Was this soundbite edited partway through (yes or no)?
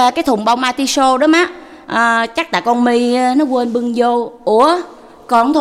yes